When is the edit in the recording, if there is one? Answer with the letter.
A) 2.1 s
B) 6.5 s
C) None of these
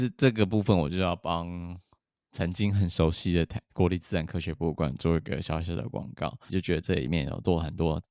B